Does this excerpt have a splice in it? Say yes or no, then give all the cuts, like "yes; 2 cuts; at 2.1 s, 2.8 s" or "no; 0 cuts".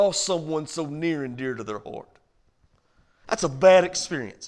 no; 0 cuts